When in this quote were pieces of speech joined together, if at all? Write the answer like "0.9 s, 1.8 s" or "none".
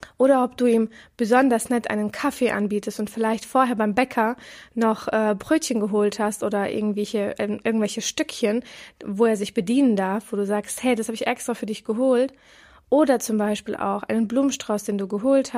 none

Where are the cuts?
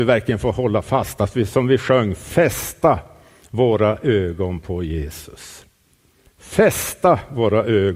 none

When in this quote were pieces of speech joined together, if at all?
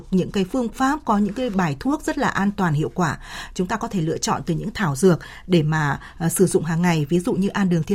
none

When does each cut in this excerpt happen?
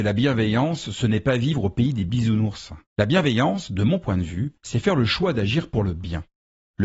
2.9 s, 4.6 s

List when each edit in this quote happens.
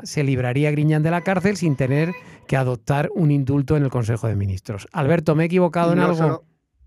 none

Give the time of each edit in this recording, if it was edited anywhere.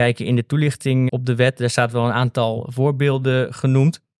1.1 s

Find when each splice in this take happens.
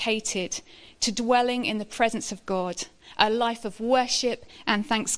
none

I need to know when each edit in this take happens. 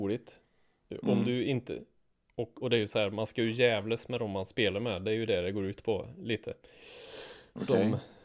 2.6 s

